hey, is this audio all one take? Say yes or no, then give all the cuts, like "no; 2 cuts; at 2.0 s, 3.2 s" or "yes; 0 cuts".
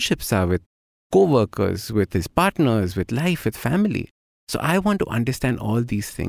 yes; 0 cuts